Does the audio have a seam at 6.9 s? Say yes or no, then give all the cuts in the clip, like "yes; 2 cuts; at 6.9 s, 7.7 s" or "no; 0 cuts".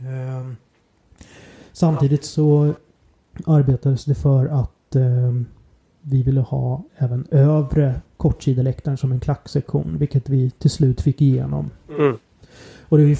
yes; 1 cut; at 6.9 s